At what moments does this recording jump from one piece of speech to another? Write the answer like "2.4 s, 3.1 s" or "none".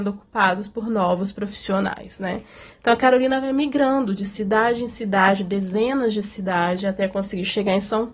none